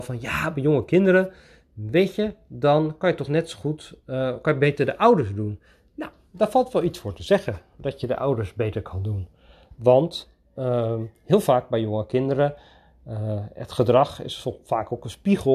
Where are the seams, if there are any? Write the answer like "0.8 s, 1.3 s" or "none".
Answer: none